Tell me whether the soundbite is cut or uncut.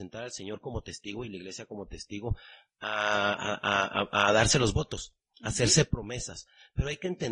uncut